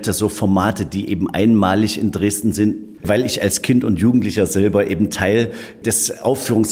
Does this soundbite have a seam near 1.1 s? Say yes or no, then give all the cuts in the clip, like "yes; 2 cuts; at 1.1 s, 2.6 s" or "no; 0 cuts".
no; 1 cut; at 3.0 s